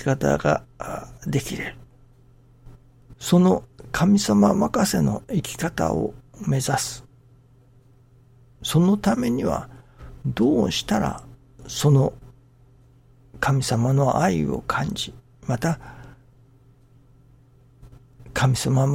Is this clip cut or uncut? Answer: cut